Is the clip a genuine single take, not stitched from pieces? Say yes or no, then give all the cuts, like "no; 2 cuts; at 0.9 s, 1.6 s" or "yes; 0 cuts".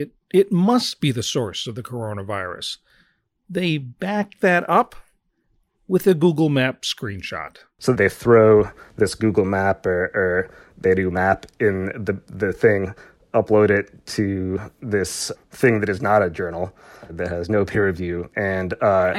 yes; 0 cuts